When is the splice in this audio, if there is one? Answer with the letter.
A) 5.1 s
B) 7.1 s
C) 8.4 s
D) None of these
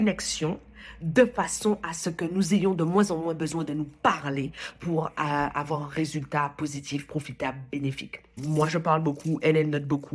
C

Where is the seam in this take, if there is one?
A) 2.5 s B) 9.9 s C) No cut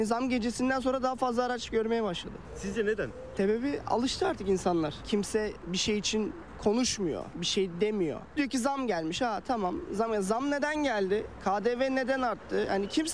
C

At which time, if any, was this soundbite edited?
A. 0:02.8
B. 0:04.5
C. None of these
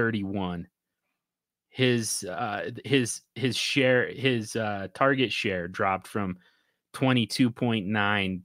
C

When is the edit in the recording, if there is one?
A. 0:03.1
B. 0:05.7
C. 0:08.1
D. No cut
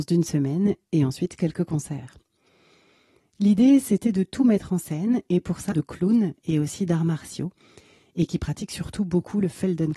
B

